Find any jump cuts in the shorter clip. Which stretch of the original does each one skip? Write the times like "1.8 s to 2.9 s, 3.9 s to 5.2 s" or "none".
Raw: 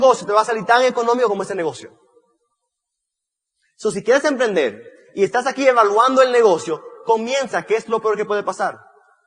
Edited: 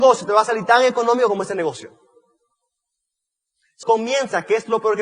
3.8 s to 7.0 s